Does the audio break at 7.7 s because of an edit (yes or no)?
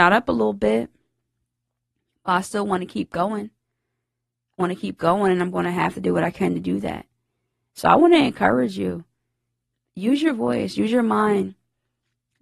no